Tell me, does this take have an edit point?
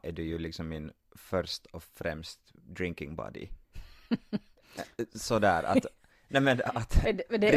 no; 0 cuts

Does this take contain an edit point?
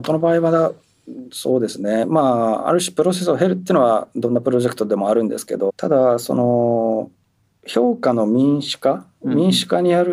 yes; 1 cut; at 5.7 s

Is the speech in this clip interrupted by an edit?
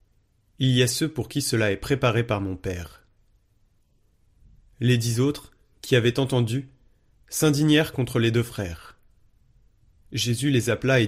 no; 0 cuts

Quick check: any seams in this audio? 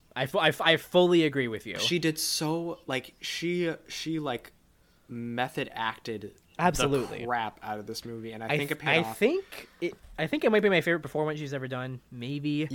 no; 0 cuts

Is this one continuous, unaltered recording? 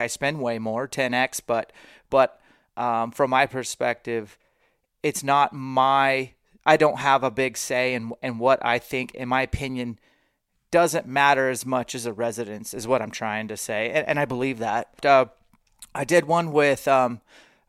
no; 1 cut; at 15.0 s

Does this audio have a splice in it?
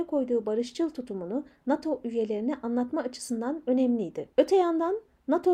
yes; 1 cut; at 4.3 s

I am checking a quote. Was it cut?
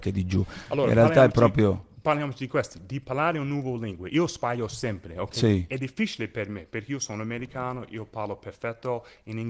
no; 0 cuts

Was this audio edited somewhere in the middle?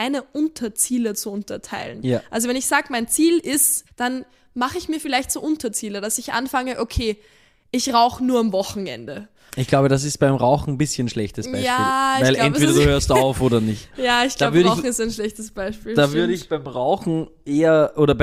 yes; 2 cuts; at 3.9 s, 9.5 s

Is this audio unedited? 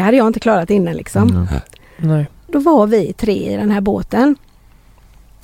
no; 1 cut; at 2.5 s

